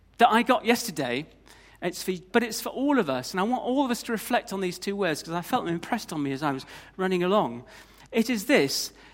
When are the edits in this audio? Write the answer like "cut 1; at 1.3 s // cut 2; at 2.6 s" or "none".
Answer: cut 1; at 2.3 s